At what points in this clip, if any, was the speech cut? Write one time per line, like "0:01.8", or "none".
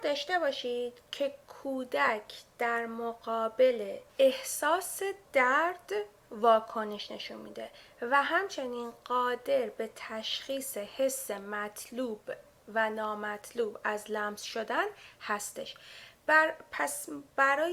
0:04.1